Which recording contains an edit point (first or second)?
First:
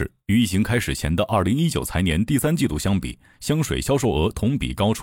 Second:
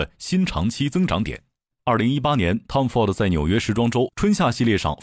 second